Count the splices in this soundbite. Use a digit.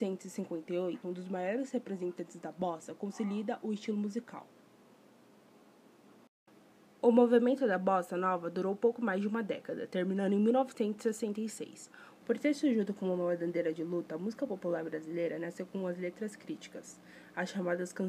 2